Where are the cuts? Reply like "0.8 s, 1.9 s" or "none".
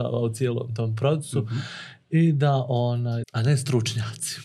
3.2 s